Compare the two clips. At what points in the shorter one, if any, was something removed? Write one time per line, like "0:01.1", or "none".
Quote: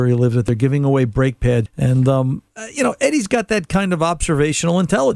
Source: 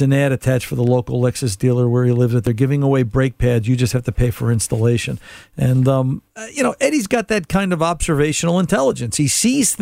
0:01.7